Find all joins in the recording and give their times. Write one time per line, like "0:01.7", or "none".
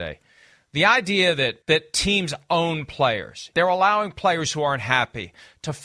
0:01.6
0:03.5